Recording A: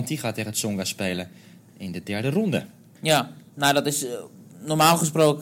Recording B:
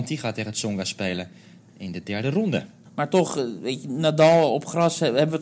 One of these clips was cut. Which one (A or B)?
B